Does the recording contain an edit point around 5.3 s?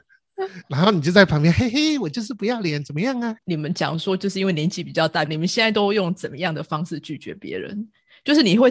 yes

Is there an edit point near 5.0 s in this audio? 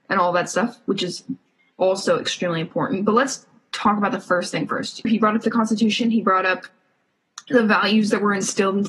yes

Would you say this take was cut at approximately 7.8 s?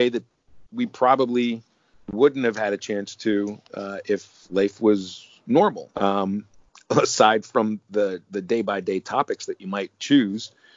no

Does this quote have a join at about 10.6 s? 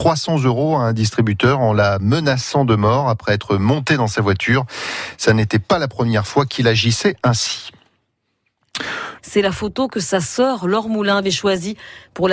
no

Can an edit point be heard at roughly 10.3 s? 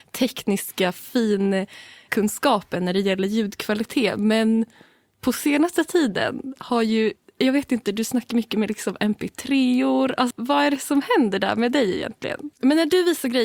yes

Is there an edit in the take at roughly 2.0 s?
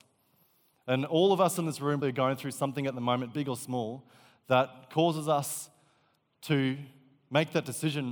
yes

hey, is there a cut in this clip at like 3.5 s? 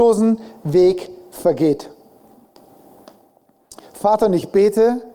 no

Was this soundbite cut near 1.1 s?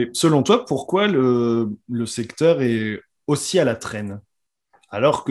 no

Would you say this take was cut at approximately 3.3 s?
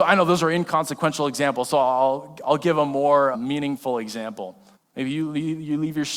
yes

